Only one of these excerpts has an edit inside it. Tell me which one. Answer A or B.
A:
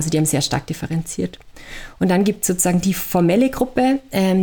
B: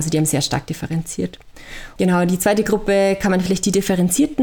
B